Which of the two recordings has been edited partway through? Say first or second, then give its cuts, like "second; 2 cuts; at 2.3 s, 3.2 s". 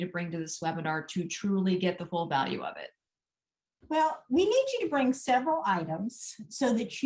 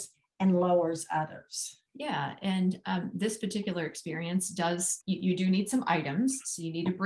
second; 2 cuts; at 1.9 s, 5.0 s